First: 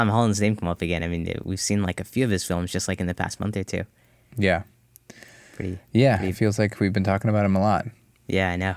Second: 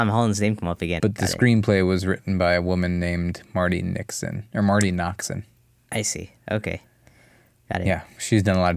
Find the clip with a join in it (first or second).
second